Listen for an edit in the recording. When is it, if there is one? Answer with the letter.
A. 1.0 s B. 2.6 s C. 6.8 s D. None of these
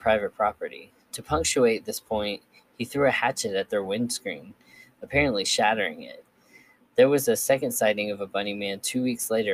D